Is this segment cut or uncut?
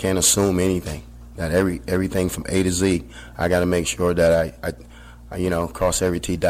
uncut